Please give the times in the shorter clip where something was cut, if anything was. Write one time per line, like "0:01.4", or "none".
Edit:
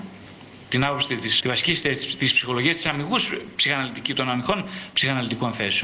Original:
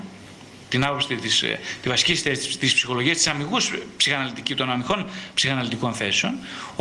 0:01.4